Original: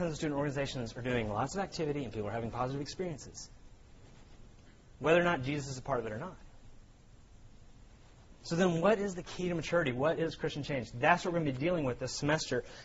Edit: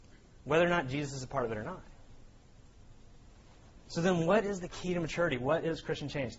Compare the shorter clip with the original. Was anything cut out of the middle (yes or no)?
no